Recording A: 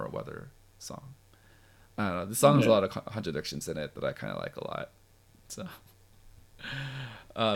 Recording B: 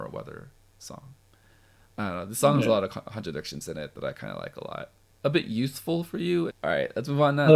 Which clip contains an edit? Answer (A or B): B